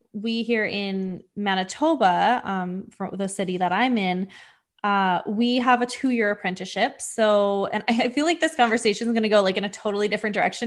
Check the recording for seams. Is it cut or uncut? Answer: uncut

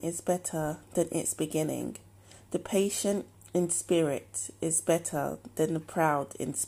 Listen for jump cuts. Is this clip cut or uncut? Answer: uncut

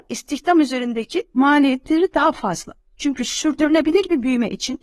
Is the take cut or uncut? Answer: uncut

